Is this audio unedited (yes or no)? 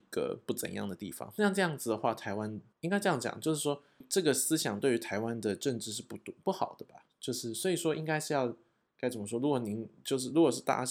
yes